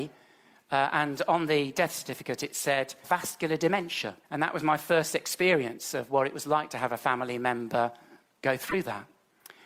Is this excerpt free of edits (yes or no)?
no